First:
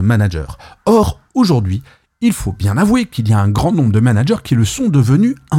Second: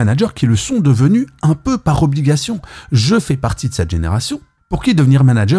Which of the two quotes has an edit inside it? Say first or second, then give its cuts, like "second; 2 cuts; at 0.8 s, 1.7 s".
second; 1 cut; at 4.6 s